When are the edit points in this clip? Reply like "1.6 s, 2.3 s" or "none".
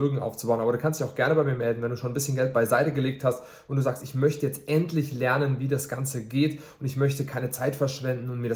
none